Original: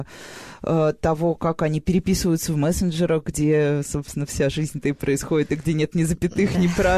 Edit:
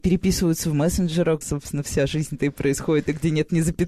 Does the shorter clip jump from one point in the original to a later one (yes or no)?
yes